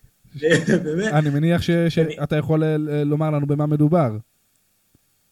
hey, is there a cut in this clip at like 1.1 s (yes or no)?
no